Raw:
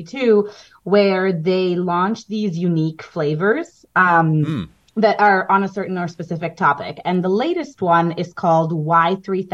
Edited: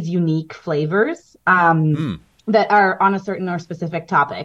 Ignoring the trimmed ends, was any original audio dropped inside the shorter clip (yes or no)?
no